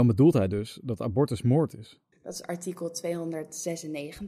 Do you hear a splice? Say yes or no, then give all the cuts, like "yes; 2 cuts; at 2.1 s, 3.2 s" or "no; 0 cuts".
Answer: yes; 1 cut; at 2.1 s